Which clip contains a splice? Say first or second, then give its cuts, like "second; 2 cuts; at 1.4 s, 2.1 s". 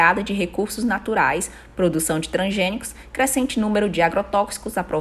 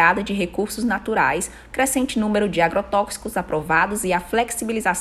second; 1 cut; at 1.7 s